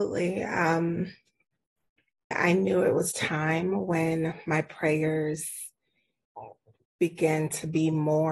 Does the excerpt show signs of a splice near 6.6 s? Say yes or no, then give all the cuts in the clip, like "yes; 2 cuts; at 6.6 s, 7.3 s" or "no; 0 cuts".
no; 1 cut; at 2.3 s